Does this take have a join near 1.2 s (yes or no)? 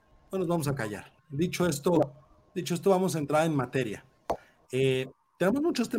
yes